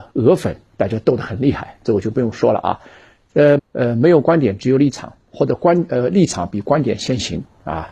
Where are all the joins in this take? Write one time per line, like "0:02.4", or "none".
0:03.6